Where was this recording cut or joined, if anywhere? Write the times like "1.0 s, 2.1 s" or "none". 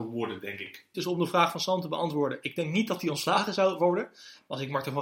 0.9 s